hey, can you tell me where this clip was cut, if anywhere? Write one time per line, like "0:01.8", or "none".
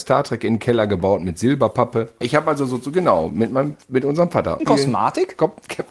0:02.2
0:04.6